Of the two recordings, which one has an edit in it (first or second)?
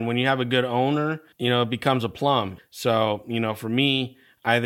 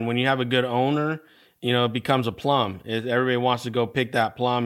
first